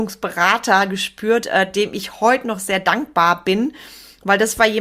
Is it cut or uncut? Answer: uncut